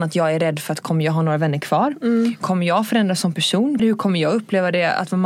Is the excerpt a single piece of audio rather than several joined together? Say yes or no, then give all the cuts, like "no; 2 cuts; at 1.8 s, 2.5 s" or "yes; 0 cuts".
no; 1 cut; at 3.8 s